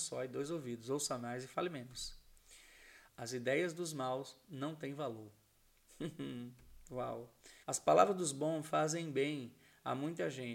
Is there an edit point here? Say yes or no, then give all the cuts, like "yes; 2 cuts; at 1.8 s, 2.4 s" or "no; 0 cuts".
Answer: yes; 2 cuts; at 3.1 s, 7.6 s